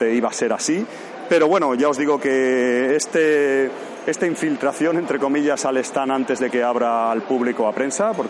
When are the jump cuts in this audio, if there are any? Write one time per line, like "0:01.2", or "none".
none